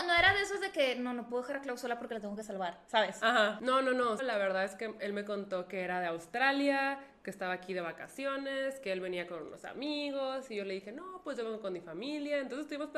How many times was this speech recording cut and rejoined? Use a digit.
1